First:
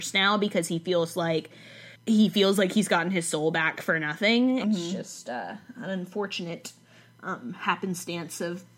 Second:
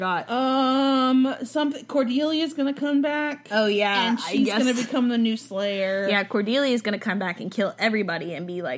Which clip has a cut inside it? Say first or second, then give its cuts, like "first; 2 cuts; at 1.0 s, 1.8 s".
first; 2 cuts; at 2.0 s, 4.6 s